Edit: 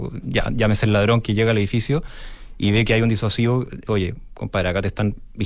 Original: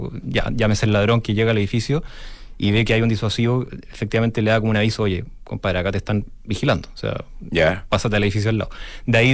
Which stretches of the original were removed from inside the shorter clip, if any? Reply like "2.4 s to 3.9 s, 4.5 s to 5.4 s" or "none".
3.9 s to 5.0 s